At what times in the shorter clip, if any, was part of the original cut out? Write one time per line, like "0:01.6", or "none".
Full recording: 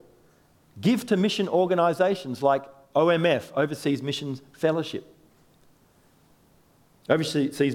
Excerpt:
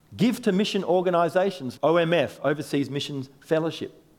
0:01.7